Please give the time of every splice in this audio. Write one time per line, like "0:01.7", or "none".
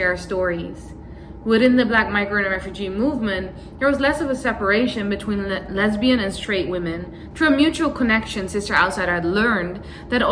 0:07.3